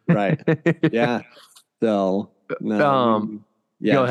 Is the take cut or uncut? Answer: uncut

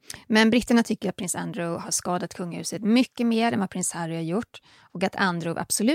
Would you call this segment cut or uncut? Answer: uncut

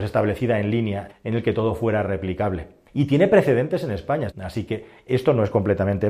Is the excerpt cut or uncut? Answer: cut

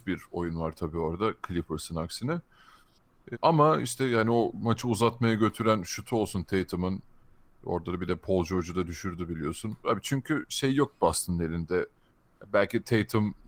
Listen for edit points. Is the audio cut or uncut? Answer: cut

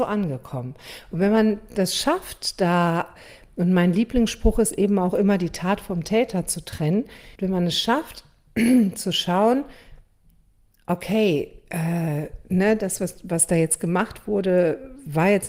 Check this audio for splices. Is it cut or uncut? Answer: cut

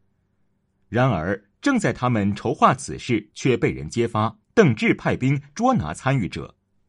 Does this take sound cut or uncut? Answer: cut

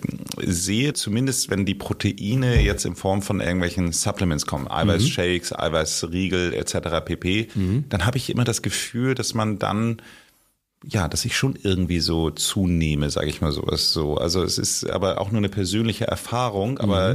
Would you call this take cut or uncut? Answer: cut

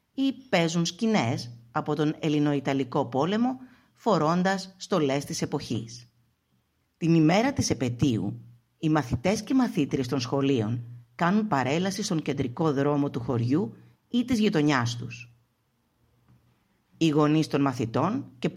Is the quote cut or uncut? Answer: cut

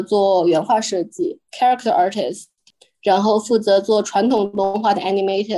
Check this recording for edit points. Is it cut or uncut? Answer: cut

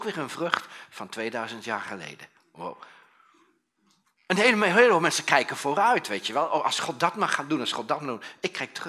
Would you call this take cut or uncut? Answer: uncut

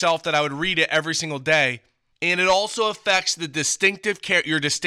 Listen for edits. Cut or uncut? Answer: cut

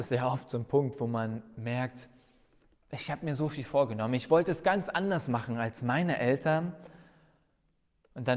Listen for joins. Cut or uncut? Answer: uncut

